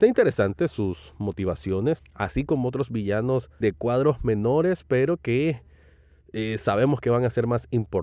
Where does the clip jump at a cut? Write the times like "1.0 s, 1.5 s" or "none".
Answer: 2.0 s, 3.6 s